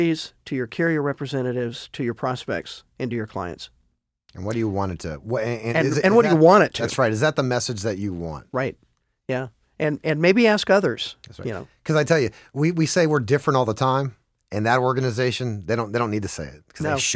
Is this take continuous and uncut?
yes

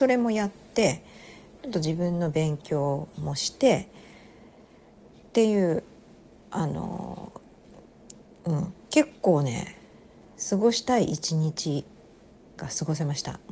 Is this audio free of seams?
yes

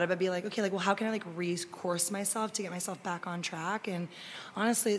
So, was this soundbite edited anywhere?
no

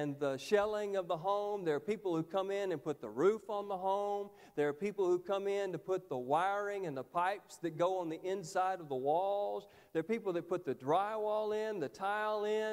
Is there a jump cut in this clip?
no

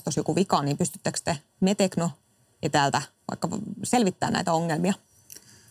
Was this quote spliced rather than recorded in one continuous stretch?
no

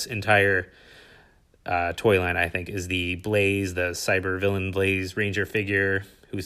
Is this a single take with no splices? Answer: yes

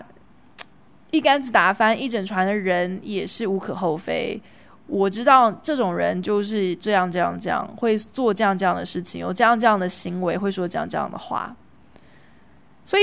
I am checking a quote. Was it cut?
no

